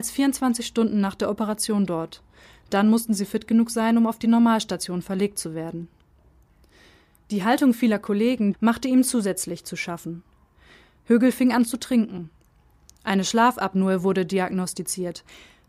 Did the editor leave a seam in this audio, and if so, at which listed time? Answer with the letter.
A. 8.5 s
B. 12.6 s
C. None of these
A